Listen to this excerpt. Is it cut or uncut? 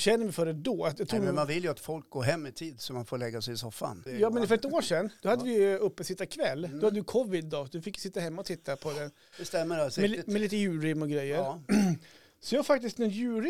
cut